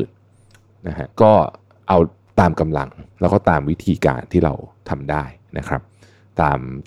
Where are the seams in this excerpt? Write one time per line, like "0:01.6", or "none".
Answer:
0:01.1